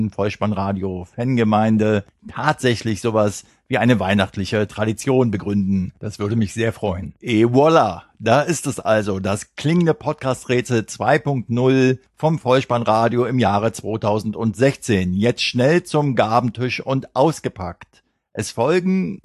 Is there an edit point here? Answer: no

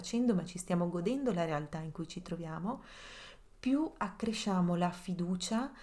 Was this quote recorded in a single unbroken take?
yes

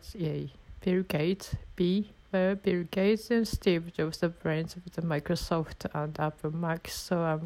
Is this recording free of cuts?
no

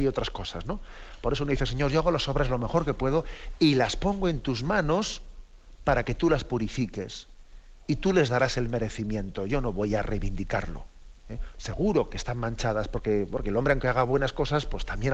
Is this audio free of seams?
no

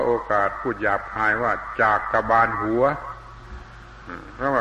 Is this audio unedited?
yes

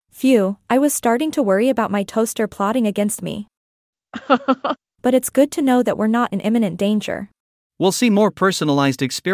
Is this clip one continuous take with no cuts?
no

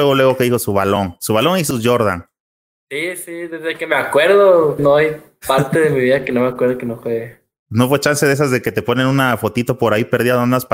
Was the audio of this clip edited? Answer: yes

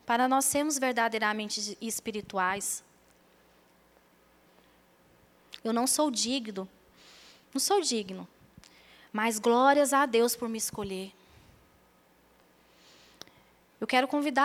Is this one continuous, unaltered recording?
no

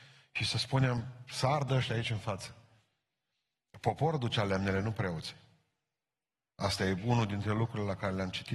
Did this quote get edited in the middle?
no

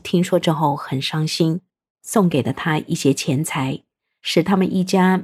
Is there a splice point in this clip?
no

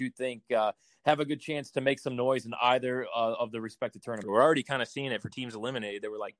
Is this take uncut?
no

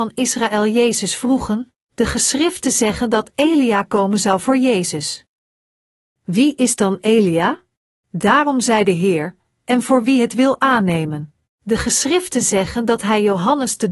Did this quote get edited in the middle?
yes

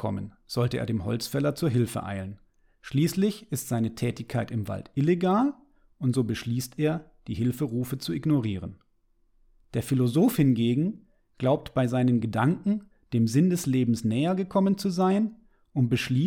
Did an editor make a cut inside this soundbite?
no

